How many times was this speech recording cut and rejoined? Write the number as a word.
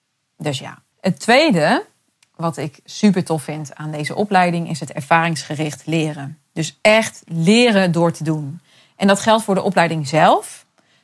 one